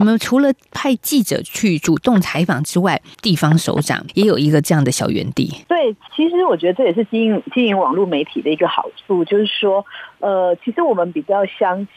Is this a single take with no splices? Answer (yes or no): yes